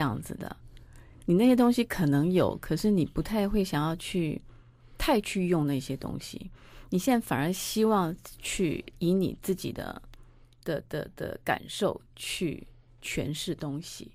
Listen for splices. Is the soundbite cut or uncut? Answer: uncut